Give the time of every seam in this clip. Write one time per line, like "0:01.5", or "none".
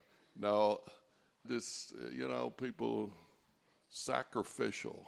0:01.4